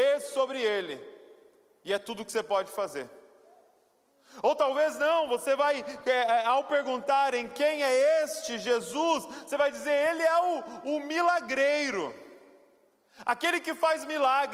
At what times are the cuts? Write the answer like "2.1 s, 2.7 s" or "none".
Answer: none

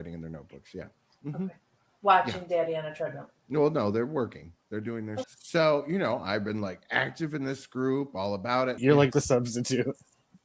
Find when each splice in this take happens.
5.2 s, 8.8 s

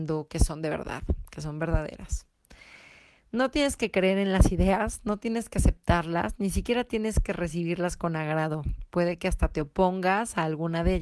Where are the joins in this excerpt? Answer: none

